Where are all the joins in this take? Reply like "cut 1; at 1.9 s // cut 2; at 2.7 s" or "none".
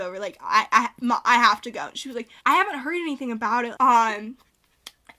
cut 1; at 2.4 s // cut 2; at 3.7 s

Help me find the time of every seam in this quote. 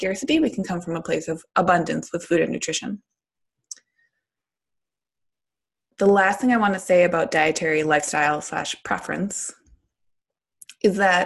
none

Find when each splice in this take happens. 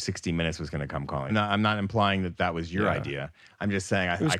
cut 1; at 1.3 s

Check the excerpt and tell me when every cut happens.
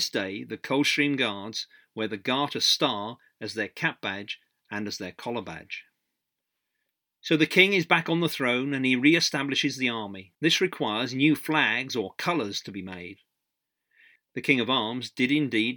cut 1; at 10.4 s // cut 2; at 14.2 s

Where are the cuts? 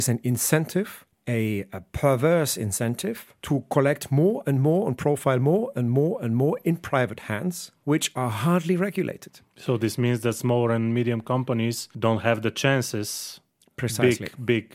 cut 1; at 3.4 s

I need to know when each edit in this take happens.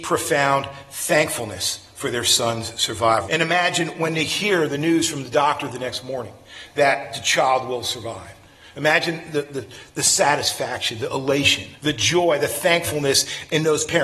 cut 1; at 3.2 s // cut 2; at 11.8 s

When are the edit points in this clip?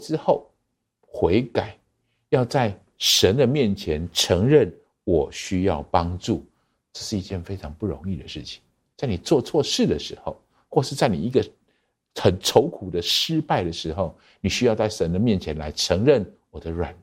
cut 1; at 8.9 s

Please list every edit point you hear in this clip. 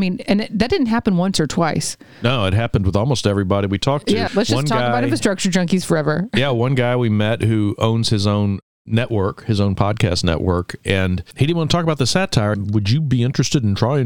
cut 1; at 4.3 s // cut 2; at 12.5 s

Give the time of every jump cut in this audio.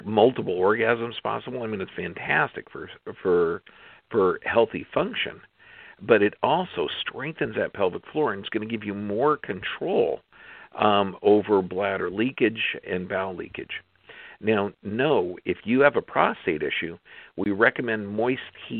none

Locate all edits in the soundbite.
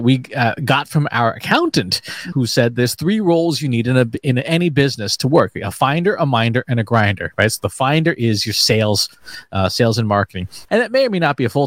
cut 1; at 2.3 s // cut 2; at 10.7 s

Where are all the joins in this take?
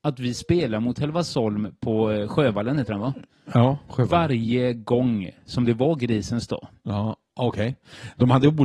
none

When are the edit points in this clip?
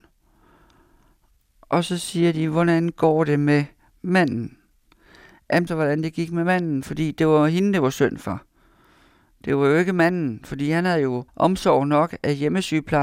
cut 1; at 5.7 s // cut 2; at 11.3 s

